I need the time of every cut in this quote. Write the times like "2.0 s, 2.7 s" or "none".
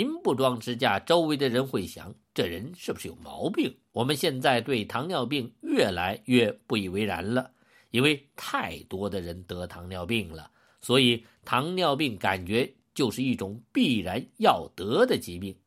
3.9 s